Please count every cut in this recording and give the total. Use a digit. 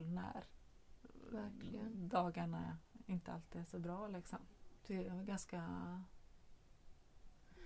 1